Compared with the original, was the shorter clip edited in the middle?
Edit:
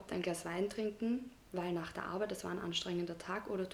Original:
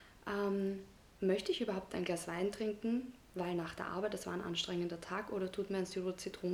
no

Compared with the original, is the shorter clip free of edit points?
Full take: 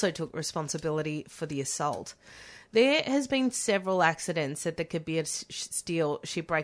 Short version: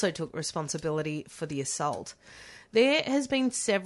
yes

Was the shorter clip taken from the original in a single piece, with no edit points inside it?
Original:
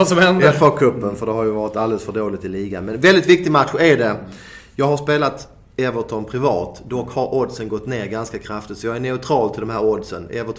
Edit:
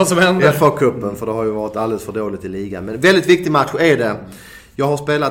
yes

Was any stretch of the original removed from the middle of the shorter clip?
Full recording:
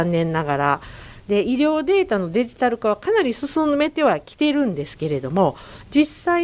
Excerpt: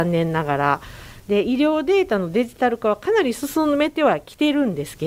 no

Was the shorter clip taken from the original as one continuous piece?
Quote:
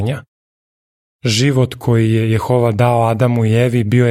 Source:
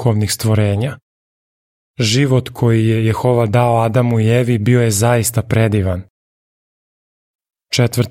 yes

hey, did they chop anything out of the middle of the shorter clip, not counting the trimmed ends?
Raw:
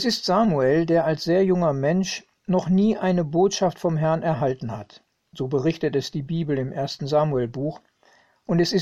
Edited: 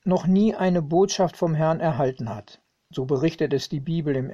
no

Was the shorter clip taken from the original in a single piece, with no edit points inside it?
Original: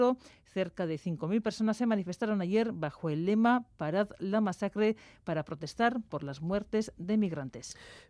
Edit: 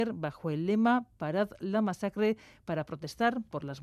yes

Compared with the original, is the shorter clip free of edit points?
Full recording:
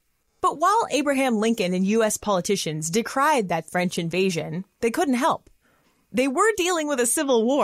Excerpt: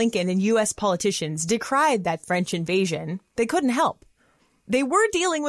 yes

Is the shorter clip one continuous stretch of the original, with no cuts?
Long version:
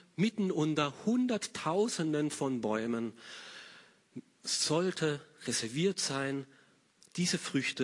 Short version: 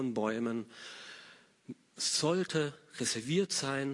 yes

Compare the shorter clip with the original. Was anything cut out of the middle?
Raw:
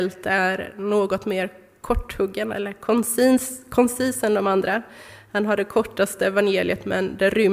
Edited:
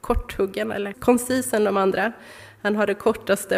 yes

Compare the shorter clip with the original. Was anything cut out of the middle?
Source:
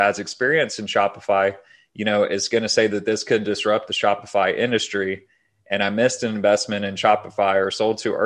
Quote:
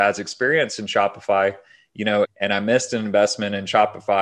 yes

